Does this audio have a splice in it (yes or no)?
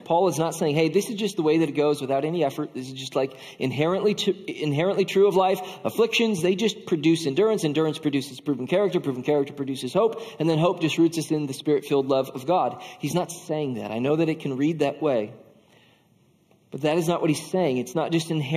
no